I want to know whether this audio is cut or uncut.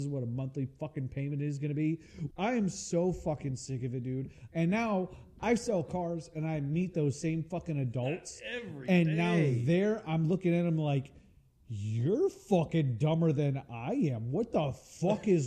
cut